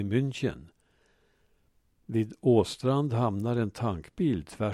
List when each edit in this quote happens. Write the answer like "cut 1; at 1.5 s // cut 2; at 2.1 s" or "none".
cut 1; at 1.9 s